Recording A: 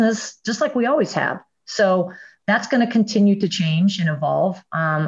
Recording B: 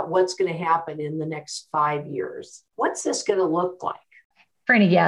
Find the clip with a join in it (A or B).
B